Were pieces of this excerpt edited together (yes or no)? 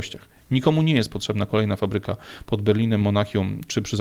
no